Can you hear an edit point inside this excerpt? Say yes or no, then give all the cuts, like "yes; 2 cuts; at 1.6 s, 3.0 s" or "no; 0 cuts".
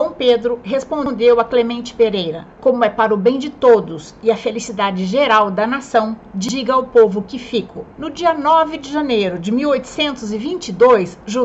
yes; 2 cuts; at 2.5 s, 7.9 s